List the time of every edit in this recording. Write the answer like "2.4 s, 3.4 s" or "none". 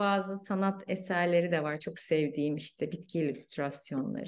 none